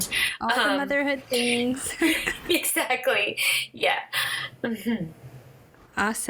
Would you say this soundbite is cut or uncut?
uncut